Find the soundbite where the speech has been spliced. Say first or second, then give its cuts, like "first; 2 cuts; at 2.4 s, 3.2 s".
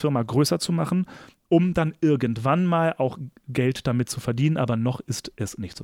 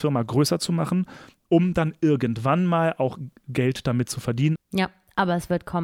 second; 1 cut; at 4.6 s